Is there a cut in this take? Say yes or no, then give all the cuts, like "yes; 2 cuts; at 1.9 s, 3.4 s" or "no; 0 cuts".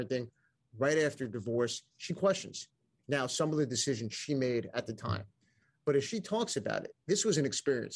no; 0 cuts